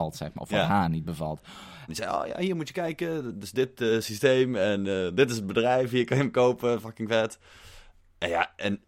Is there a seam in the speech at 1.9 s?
yes; 1 cut; at 1.9 s

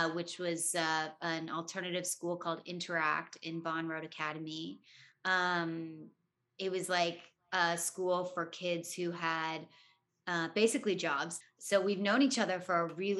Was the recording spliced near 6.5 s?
no; 1 cut; at 11.4 s

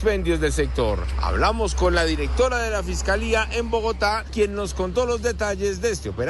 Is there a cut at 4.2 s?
yes; 1 cut; at 4.2 s

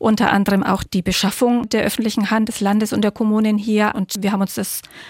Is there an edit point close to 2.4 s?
no; 1 cut; at 3.9 s

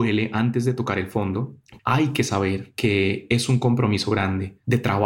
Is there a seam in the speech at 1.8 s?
yes; 1 cut; at 1.8 s

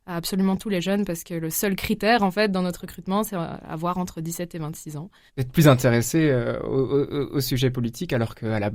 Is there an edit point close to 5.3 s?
yes; 1 cut; at 5.3 s

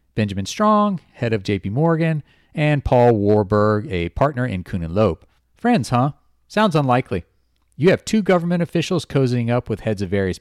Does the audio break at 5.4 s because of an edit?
yes; 1 cut; at 5.4 s

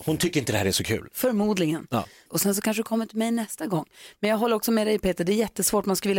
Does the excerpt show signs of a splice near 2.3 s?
yes; 1 cut; at 2.3 s

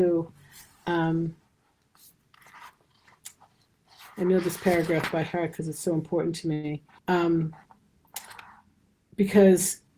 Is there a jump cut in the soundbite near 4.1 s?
no; 1 cut; at 7.0 s

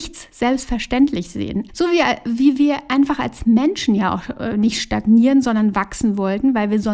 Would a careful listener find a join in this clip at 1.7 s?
yes; 1 cut; at 1.7 s

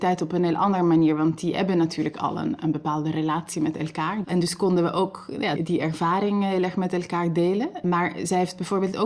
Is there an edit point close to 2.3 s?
no; 2 cuts; at 4.2 s, 5.6 s

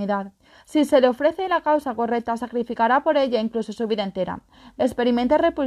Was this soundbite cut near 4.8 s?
yes; 1 cut; at 4.8 s

